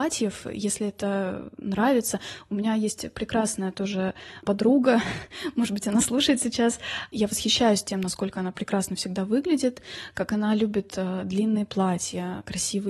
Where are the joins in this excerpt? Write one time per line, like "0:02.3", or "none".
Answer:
none